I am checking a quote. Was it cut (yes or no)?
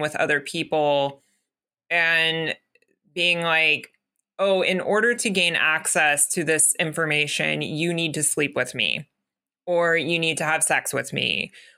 no